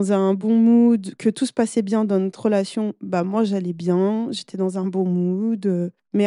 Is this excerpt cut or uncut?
uncut